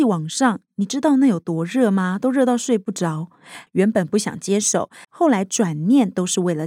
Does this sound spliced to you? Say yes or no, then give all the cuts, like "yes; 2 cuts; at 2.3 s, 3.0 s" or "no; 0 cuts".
yes; 2 cuts; at 3.7 s, 5.0 s